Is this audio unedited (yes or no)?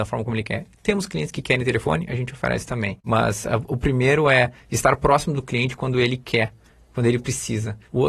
yes